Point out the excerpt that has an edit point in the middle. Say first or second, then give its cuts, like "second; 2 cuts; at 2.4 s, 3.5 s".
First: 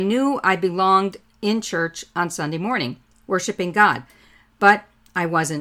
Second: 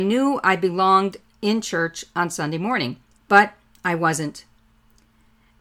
second; 1 cut; at 3.2 s